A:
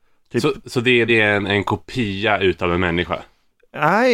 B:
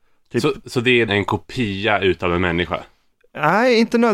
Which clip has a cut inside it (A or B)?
B